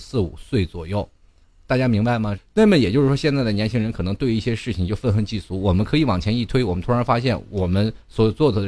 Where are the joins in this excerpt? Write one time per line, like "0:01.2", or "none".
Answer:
0:02.4